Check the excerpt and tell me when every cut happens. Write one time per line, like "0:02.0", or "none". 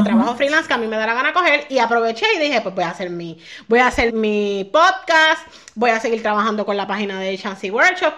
0:04.1